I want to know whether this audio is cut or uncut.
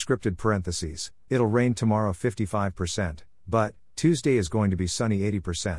cut